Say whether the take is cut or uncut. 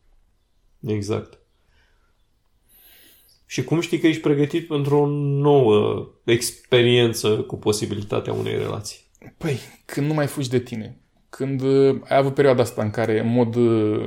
uncut